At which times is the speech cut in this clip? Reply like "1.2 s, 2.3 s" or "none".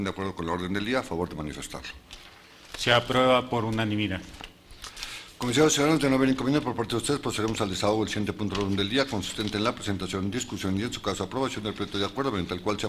none